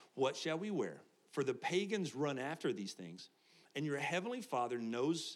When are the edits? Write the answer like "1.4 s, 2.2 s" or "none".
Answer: none

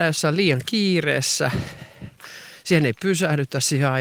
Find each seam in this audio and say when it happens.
none

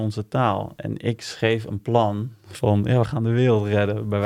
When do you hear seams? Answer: none

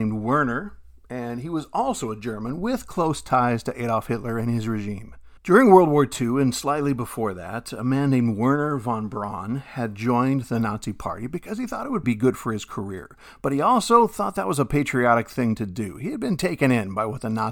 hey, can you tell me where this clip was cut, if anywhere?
5.4 s, 12.0 s

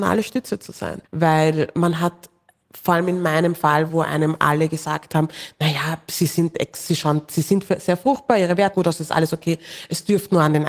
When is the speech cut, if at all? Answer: 1.0 s, 8.7 s

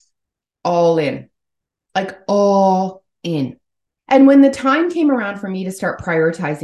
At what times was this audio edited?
4.0 s

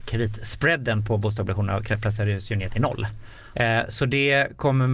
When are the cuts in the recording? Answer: 3.5 s

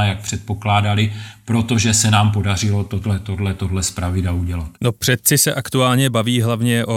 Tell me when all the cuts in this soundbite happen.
4.7 s

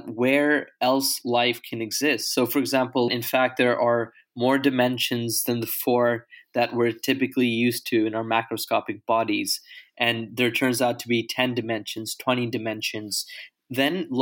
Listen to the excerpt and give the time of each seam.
3.1 s

